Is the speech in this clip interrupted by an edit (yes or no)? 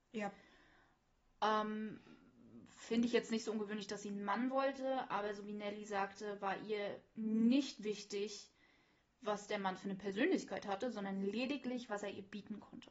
no